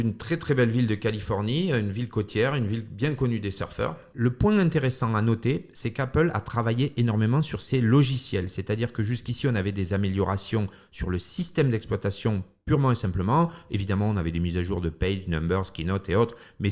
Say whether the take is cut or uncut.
cut